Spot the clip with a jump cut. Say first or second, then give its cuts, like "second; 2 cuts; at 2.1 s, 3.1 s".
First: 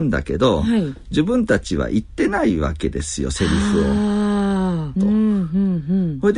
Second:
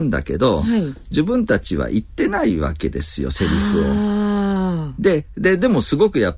first; 1 cut; at 4.9 s